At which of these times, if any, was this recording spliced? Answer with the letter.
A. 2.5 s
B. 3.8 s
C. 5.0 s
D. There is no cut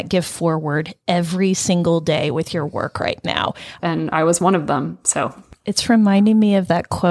B